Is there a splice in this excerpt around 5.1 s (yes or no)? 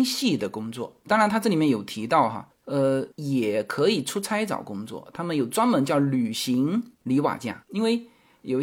no